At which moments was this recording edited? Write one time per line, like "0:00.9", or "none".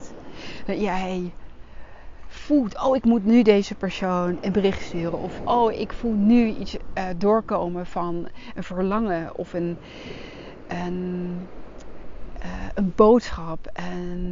none